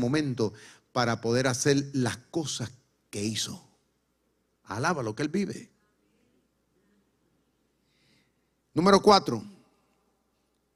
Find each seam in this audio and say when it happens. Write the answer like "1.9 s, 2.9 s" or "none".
none